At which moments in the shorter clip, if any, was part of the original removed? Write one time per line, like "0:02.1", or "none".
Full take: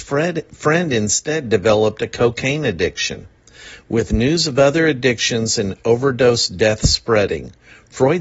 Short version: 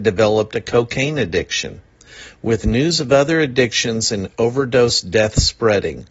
none